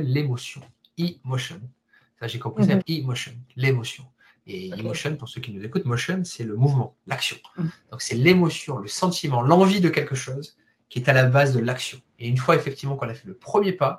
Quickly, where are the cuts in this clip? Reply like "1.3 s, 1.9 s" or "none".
2.8 s